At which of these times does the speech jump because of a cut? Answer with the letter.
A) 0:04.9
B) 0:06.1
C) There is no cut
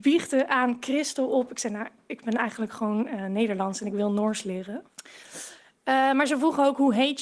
A